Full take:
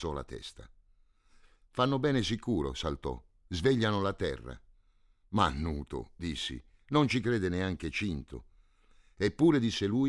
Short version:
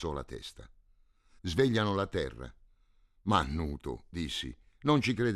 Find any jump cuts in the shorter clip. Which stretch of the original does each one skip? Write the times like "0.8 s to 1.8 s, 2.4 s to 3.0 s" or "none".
1.4 s to 3.4 s